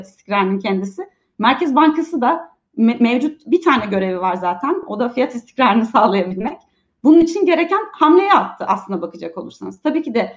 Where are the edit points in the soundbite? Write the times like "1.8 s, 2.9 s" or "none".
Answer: none